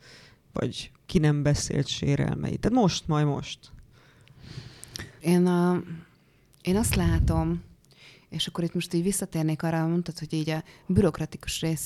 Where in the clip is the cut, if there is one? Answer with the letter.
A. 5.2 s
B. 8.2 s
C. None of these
A